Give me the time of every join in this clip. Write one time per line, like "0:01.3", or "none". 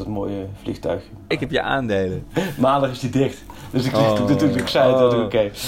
0:01.3

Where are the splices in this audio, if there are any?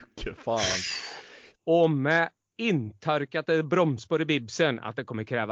0:01.5

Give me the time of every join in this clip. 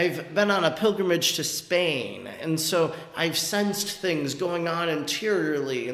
none

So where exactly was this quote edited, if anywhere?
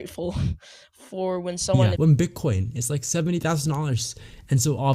0:02.0

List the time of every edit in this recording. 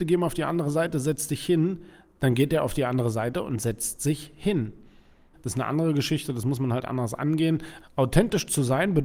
0:05.3
0:07.8

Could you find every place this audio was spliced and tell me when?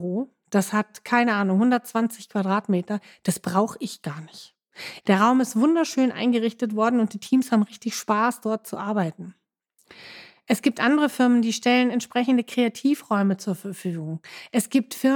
0:05.0

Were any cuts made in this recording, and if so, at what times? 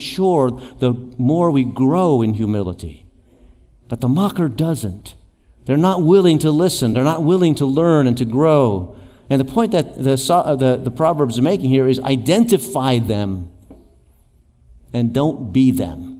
none

